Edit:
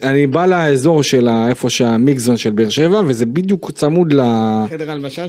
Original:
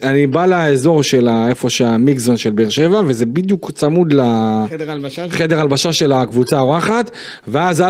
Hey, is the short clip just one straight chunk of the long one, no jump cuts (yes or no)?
yes